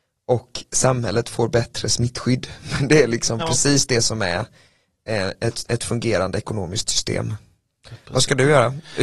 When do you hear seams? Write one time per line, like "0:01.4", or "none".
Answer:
none